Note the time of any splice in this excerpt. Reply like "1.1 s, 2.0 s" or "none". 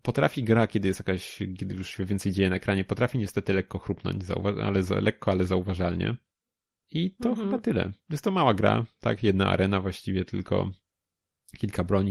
none